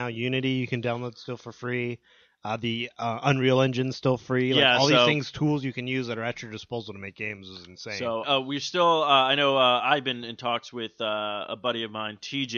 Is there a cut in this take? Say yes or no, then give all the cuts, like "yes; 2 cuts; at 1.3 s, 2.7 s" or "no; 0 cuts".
yes; 1 cut; at 8.2 s